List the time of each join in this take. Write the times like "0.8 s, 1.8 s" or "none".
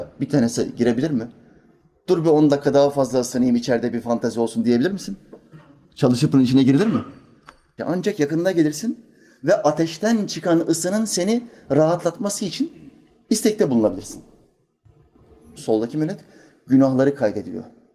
7.8 s, 15.6 s